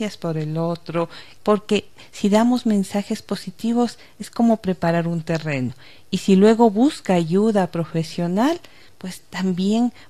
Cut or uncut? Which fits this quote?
cut